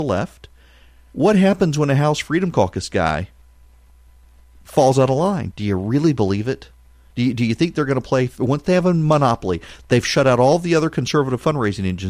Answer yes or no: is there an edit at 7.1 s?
no